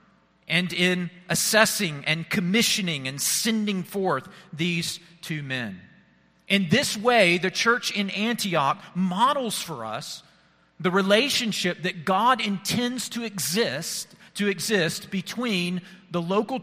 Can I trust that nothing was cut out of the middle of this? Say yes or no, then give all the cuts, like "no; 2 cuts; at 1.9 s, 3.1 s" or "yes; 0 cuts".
yes; 0 cuts